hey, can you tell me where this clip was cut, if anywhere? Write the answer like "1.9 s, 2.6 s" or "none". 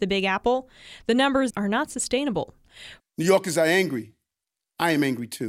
1.5 s, 3.0 s